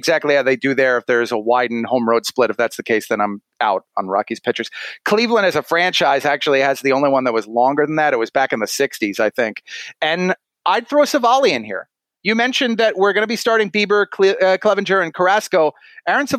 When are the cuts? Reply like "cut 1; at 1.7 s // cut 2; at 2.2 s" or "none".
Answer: cut 1; at 5.0 s